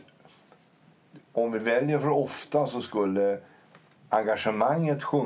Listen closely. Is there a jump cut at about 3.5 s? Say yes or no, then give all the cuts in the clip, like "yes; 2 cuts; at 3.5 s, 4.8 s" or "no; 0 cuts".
no; 0 cuts